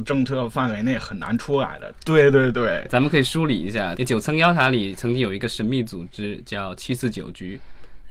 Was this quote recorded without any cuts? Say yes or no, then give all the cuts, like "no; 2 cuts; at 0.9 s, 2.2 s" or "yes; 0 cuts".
no; 2 cuts; at 1.9 s, 4.0 s